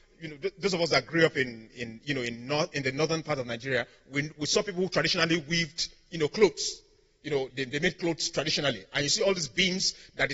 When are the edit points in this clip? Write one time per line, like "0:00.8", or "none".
0:07.5